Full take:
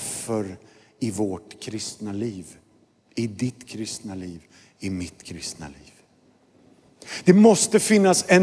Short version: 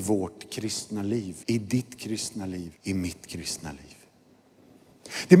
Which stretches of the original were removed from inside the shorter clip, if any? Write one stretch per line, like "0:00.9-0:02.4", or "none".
0:02.5-0:03.1
0:04.4-0:04.7